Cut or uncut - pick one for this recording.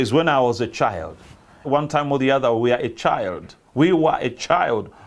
cut